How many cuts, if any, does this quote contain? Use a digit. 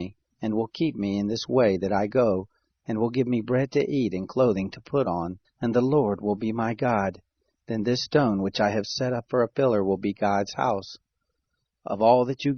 1